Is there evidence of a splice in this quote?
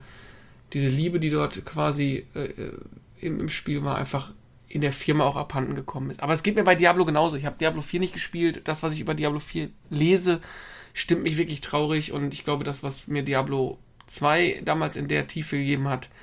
no; 0 cuts

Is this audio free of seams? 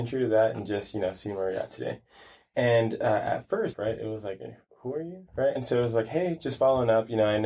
no; 2 cuts; at 3.7 s, 5.6 s

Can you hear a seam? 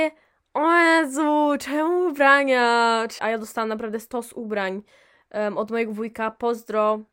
yes; 1 cut; at 3.2 s

